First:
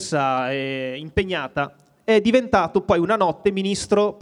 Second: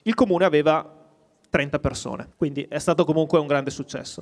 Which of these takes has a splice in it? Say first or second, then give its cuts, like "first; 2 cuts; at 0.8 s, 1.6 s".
second; 1 cut; at 2.3 s